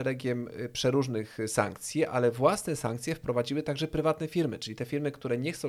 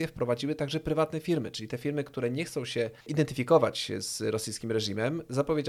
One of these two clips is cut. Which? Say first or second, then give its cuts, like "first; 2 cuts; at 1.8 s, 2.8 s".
second; 1 cut; at 3.0 s